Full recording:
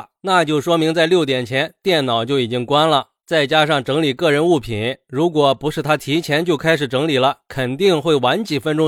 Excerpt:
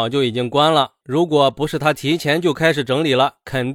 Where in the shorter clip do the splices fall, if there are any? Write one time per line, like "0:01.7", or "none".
0:01.0